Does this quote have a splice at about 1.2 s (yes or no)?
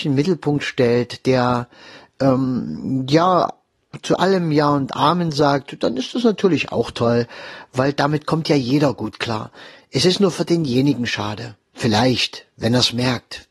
no